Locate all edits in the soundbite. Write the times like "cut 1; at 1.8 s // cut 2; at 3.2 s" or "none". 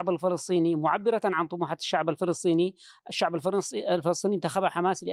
none